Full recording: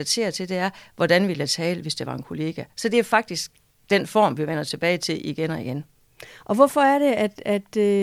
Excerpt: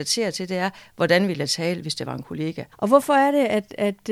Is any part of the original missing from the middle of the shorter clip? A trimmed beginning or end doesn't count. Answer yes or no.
yes